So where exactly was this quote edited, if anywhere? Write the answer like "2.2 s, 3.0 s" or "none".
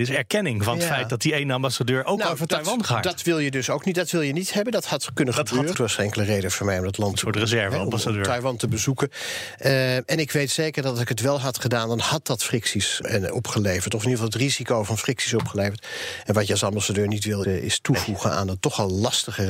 5.7 s, 13.0 s, 17.4 s